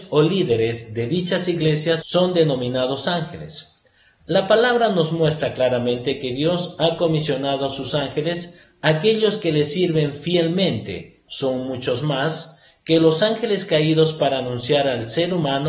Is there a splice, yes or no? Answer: yes